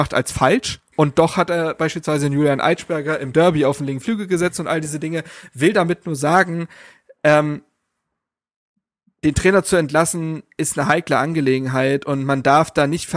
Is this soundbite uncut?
yes; 0 cuts

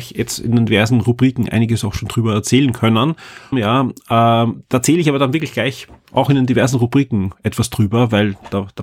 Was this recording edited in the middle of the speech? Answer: yes; 1 cut; at 3.5 s

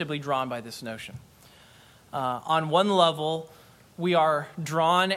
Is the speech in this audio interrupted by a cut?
no; 0 cuts

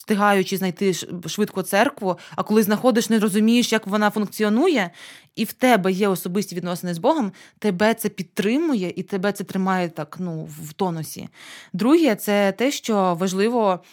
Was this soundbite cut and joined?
no; 0 cuts

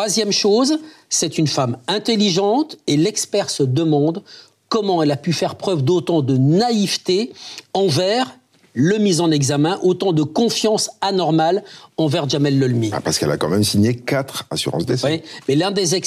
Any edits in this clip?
no; 0 cuts

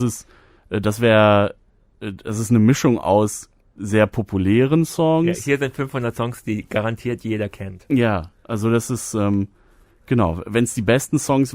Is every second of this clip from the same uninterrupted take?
yes; 0 cuts

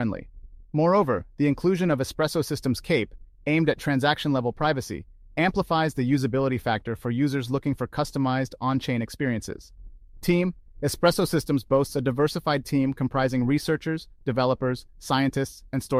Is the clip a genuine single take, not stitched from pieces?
yes; 0 cuts

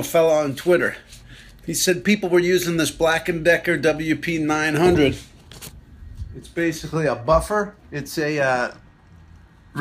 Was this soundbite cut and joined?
yes; 1 cut; at 7.8 s

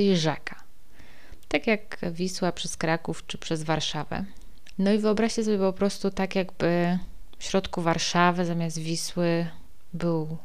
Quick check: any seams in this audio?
yes; 1 cut; at 4.7 s

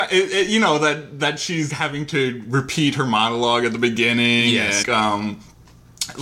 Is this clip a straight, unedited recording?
no; 2 cuts; at 1.7 s, 4.8 s

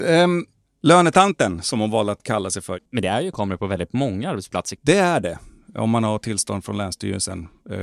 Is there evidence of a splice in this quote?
yes; 2 cuts; at 2.9 s, 4.8 s

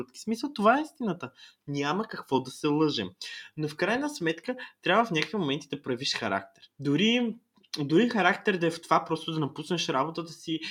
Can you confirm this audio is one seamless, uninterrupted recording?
no; 1 cut; at 6.7 s

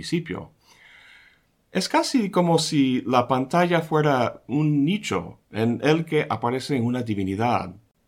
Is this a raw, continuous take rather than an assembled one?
yes; 0 cuts

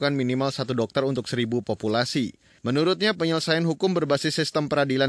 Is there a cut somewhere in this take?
yes; 1 cut; at 2.6 s

